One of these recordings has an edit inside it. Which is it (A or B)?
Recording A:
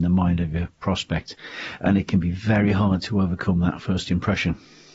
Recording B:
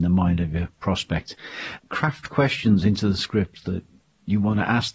B